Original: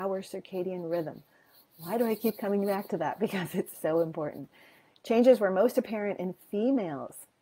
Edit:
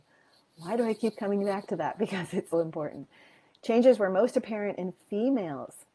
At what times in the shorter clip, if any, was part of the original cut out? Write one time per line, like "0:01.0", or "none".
0:02.5